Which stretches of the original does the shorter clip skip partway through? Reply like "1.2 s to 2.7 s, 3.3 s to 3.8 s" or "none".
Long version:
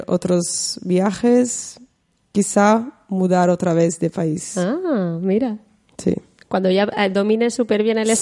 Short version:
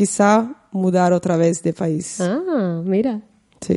none